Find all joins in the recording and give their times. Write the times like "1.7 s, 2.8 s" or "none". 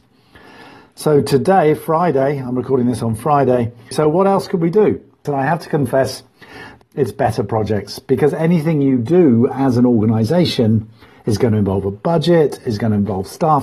3.9 s, 5.3 s, 6.8 s